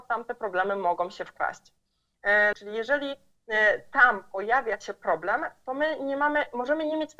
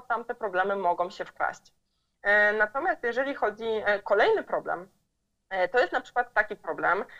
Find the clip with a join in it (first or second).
first